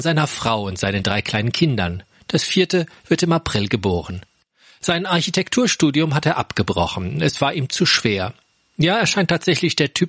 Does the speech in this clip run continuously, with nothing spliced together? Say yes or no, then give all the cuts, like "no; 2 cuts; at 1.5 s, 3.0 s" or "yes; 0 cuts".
yes; 0 cuts